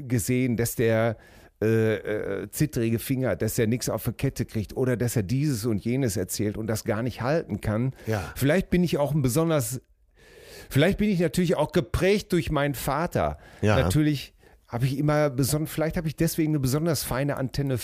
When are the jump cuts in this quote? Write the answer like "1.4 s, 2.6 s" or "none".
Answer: none